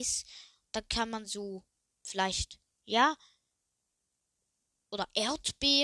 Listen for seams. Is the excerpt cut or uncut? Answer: uncut